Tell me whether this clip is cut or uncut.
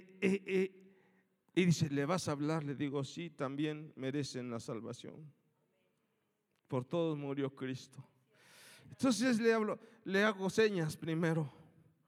uncut